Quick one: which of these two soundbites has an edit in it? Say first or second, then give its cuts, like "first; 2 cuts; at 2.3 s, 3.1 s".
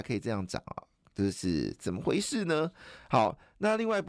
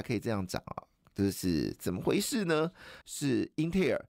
second; 1 cut; at 3.0 s